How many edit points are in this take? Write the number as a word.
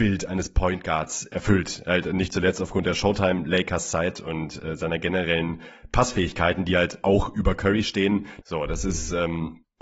one